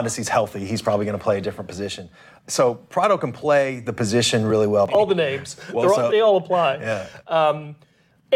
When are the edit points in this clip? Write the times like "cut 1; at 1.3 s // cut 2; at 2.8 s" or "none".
cut 1; at 2.4 s // cut 2; at 4.9 s // cut 3; at 6.1 s